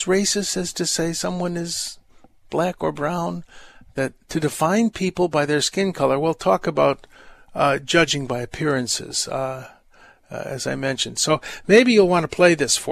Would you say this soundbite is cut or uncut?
uncut